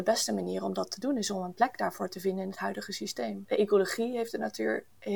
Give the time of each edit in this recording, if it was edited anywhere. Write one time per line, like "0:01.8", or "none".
0:03.5